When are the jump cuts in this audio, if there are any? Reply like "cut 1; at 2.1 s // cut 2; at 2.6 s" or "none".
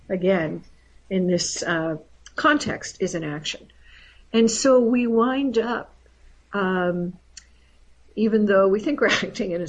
cut 1; at 8.0 s